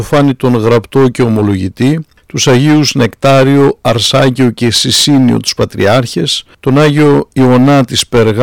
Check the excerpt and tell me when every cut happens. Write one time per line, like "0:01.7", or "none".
none